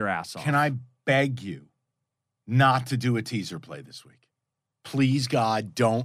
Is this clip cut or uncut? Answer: uncut